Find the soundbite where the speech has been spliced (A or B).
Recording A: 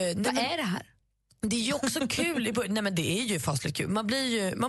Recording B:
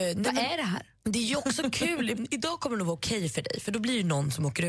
B